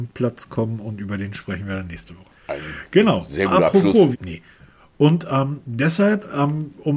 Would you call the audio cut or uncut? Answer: cut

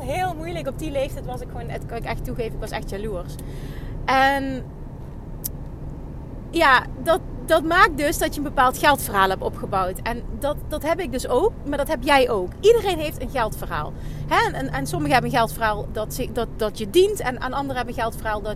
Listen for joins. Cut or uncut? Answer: uncut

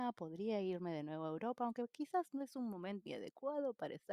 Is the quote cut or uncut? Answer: cut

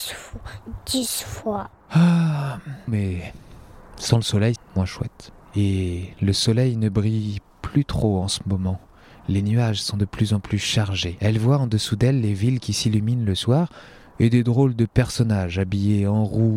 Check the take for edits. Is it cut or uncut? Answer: cut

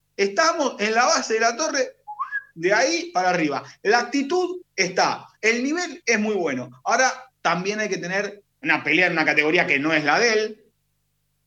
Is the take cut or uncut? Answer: cut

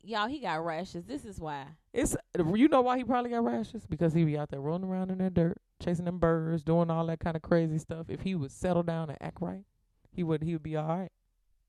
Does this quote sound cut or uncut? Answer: uncut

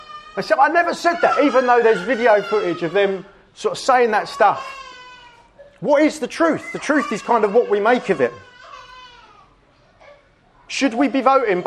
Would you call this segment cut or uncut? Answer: uncut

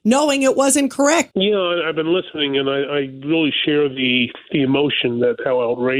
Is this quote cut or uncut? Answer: cut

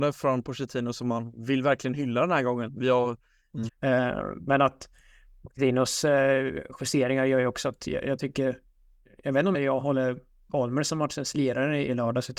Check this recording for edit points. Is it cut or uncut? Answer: cut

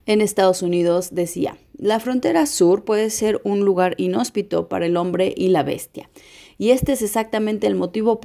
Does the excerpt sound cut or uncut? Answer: uncut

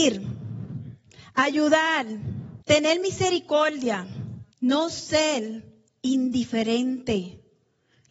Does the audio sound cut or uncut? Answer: cut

